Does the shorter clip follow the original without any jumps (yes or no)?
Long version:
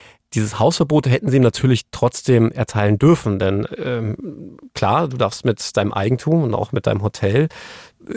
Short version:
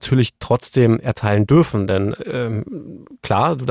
yes